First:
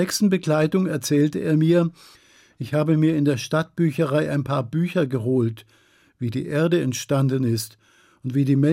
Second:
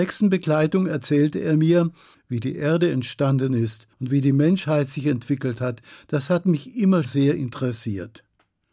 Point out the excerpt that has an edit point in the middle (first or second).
second